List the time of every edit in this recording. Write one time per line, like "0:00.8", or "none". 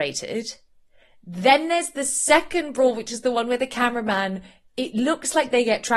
none